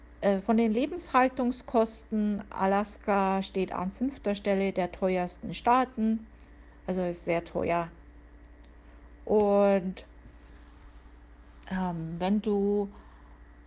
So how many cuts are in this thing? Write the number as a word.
zero